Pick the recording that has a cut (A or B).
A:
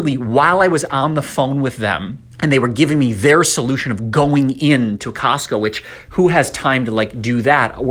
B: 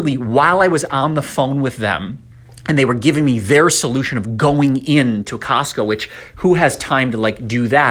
A